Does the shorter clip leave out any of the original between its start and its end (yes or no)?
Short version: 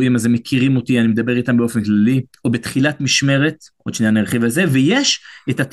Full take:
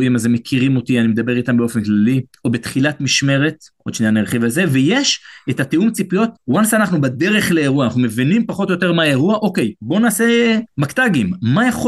no